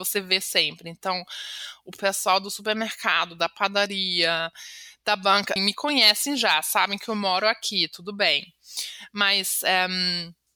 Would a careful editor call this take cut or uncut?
cut